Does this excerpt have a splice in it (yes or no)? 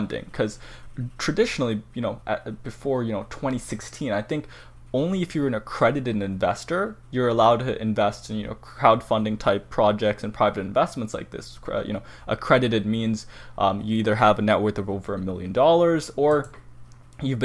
no